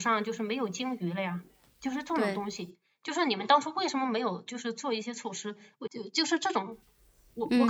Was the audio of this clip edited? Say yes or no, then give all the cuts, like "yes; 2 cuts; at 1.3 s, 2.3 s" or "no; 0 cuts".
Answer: yes; 1 cut; at 5.9 s